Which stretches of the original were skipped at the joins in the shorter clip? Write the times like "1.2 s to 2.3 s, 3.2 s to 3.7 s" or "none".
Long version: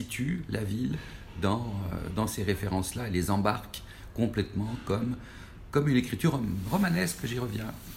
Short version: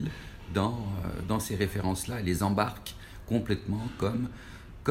none